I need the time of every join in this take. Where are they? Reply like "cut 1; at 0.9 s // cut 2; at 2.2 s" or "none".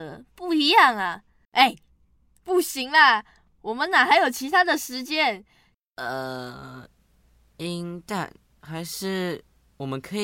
cut 1; at 1.4 s // cut 2; at 5.7 s